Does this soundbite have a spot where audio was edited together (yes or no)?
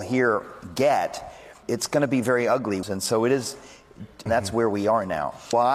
yes